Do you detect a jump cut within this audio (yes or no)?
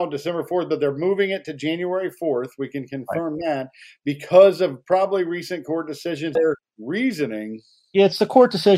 yes